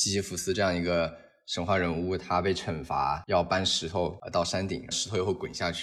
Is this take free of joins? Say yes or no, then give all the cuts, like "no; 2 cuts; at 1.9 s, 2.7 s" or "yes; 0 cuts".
no; 1 cut; at 4.9 s